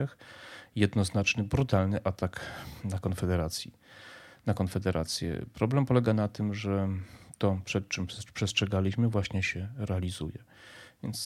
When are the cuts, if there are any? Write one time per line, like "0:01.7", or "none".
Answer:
none